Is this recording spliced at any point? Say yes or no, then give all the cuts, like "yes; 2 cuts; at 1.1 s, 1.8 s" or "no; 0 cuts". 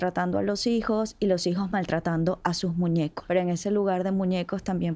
no; 0 cuts